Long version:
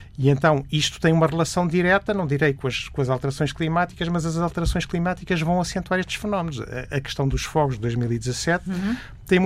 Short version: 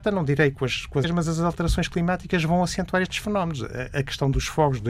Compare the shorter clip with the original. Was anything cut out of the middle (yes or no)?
yes